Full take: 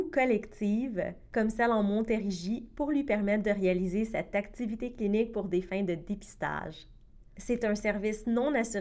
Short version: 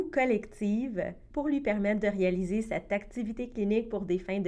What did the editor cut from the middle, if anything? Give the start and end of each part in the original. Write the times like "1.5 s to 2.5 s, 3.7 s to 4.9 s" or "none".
1.3 s to 2.7 s

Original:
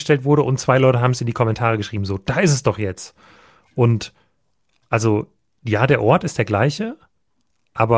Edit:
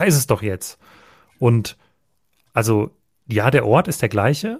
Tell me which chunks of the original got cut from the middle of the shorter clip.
none

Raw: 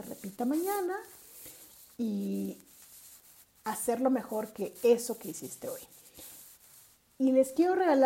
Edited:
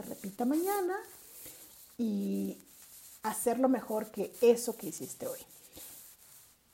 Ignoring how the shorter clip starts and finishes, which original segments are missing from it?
3.2 s to 3.6 s

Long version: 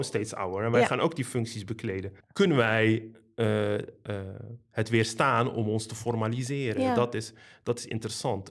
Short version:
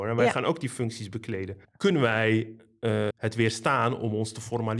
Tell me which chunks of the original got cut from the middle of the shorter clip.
3.7 s to 4.6 s

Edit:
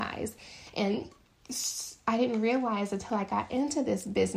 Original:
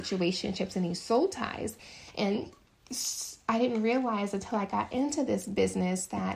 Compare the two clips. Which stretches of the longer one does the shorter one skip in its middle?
none

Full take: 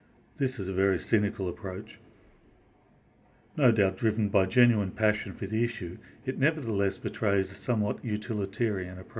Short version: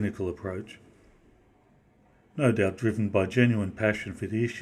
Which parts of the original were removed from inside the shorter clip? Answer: none

